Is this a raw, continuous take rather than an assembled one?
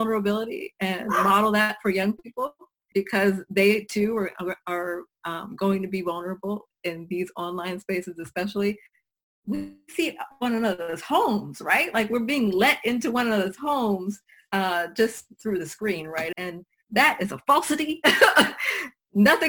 no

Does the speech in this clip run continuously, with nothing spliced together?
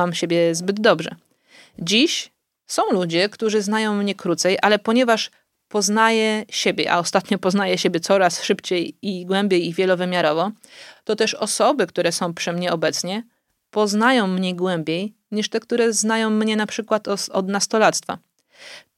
yes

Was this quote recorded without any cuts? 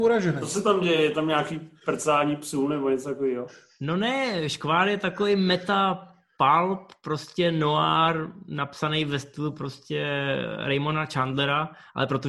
yes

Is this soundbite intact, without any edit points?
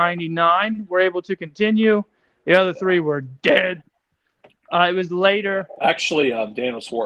yes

